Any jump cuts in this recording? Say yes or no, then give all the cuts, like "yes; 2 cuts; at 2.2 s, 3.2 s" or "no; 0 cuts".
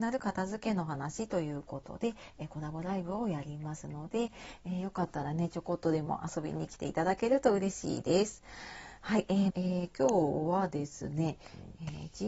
yes; 1 cut; at 9.5 s